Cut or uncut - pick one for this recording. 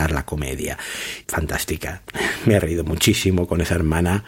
cut